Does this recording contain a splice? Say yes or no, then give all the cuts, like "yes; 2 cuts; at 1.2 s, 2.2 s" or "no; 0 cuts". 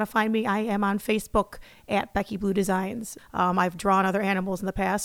yes; 1 cut; at 3.2 s